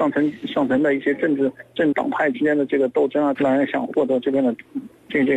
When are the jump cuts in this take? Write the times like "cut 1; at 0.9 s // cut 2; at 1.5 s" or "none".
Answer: cut 1; at 1.9 s // cut 2; at 3.4 s